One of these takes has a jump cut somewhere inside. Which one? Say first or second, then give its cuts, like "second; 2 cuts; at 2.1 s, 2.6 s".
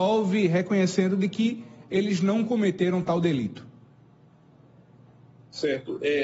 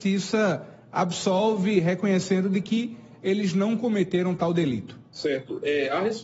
second; 1 cut; at 5.1 s